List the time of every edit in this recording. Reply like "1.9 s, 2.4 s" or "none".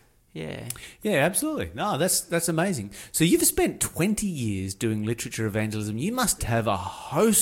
6.4 s